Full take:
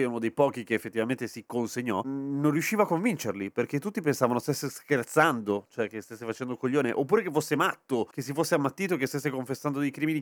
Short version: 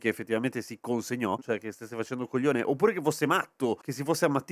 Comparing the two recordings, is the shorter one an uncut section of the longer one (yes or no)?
no